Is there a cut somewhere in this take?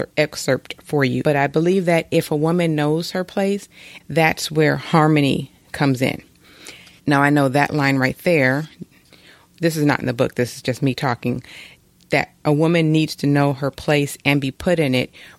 yes; 3 cuts; at 1.2 s, 4.0 s, 7.0 s

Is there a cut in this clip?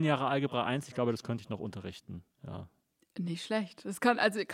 no; 0 cuts

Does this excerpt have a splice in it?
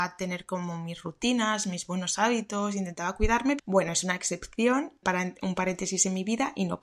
yes; 2 cuts; at 3.6 s, 5.0 s

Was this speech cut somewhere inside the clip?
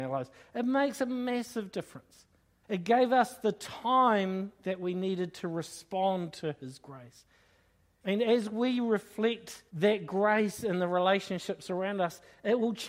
yes; 3 cuts; at 2.6 s, 8.0 s, 9.7 s

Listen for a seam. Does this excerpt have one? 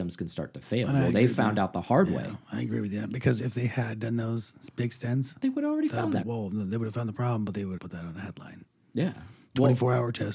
yes; 2 cuts; at 6.2 s, 7.8 s

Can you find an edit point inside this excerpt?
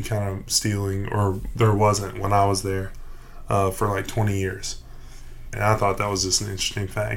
yes; 1 cut; at 5.5 s

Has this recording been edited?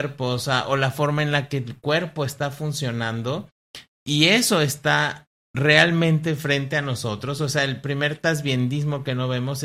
no; 0 cuts

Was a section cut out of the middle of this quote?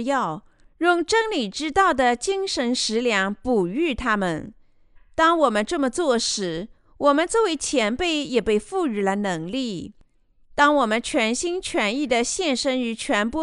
no; 0 cuts

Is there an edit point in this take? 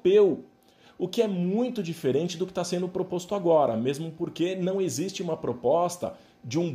no; 0 cuts

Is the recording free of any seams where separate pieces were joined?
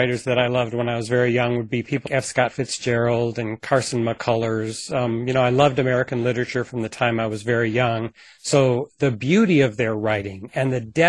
no; 1 cut; at 2.0 s

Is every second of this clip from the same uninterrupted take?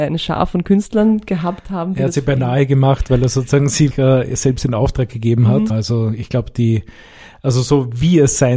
no; 2 cuts; at 3.9 s, 5.7 s

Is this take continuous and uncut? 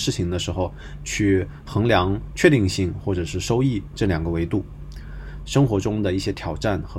no; 1 cut; at 5.4 s

